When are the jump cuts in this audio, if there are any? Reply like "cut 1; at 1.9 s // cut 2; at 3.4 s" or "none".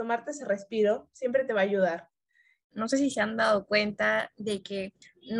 cut 1; at 2.6 s